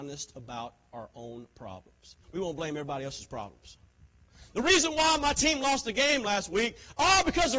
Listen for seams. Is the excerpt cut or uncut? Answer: cut